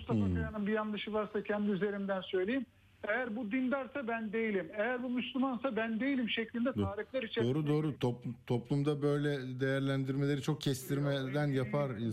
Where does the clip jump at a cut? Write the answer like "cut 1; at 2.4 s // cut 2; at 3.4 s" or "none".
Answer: cut 1; at 7.9 s